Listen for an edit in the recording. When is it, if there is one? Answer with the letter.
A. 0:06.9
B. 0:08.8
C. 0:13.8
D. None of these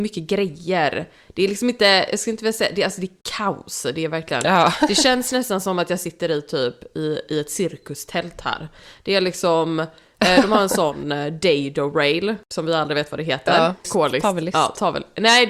C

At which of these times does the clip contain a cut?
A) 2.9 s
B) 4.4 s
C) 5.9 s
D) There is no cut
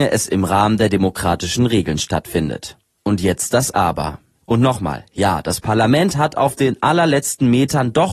B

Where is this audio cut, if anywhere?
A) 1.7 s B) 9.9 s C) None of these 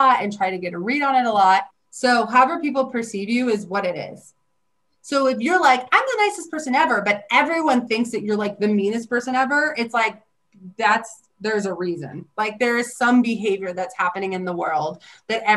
A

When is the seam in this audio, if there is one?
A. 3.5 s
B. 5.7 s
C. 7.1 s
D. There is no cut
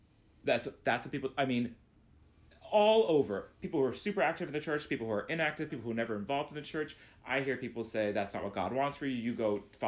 B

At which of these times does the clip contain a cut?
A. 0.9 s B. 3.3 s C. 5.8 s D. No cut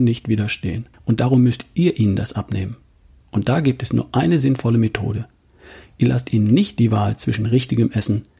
A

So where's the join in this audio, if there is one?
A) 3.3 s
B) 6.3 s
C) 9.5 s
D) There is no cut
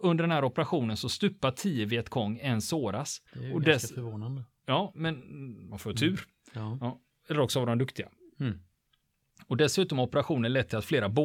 A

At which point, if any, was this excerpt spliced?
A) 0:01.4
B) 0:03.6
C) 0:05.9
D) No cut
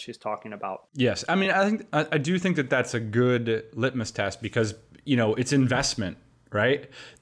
D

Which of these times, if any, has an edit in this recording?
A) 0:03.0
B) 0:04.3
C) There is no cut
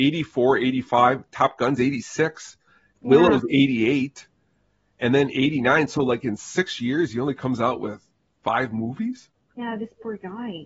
C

